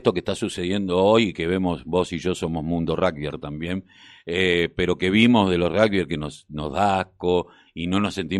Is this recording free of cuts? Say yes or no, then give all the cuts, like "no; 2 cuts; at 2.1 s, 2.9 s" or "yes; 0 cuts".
yes; 0 cuts